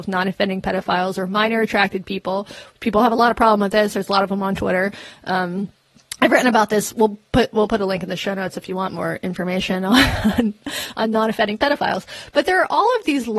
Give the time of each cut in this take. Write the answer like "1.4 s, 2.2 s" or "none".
none